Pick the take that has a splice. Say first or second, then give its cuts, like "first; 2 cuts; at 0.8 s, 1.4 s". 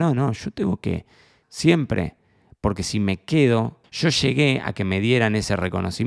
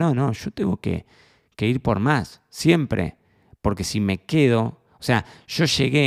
first; 2 cuts; at 1.4 s, 3.8 s